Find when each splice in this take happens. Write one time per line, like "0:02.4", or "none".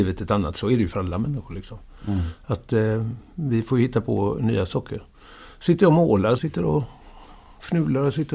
0:06.4